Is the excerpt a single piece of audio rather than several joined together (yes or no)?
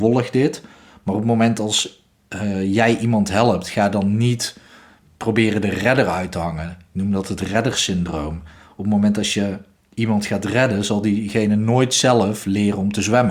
yes